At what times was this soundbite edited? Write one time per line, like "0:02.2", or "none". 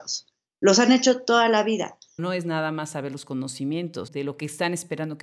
0:02.2
0:04.1